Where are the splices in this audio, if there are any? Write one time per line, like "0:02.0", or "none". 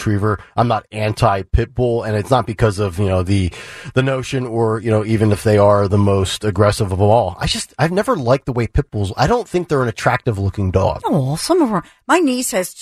none